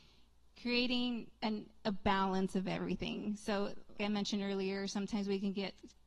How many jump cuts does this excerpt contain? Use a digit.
2